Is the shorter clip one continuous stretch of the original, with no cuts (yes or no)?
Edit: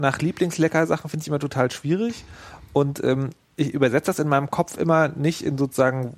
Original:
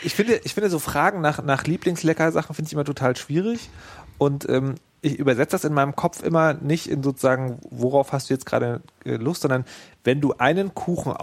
yes